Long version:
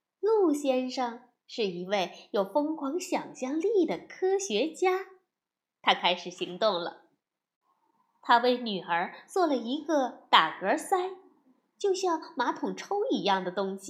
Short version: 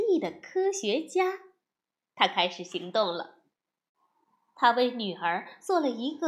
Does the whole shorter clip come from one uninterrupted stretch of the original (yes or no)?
yes